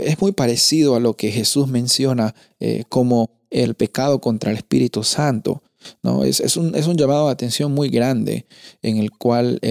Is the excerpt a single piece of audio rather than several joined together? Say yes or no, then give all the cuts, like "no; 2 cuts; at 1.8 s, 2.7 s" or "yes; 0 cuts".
yes; 0 cuts